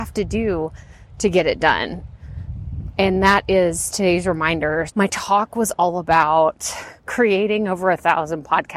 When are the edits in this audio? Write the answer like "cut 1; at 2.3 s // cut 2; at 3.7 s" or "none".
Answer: cut 1; at 4.9 s // cut 2; at 7.0 s

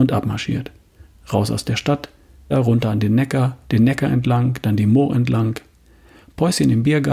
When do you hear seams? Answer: cut 1; at 2.5 s // cut 2; at 3.6 s

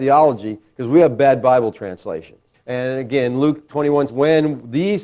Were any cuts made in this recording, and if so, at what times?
cut 1; at 2.5 s // cut 2; at 4.1 s

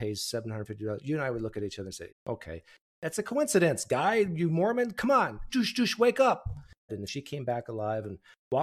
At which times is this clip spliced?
cut 1; at 2.1 s // cut 2; at 5.5 s // cut 3; at 6.9 s

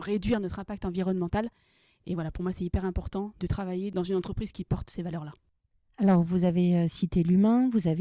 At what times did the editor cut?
none

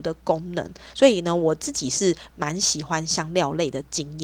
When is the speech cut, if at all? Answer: none

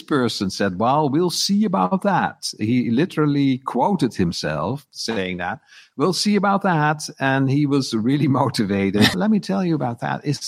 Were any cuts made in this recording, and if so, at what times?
cut 1; at 9.1 s

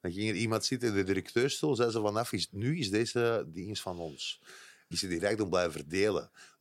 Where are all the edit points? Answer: cut 1; at 4.9 s

